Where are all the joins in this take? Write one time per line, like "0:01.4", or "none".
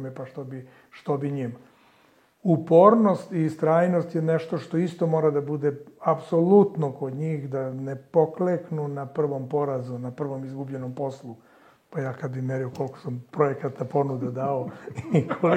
none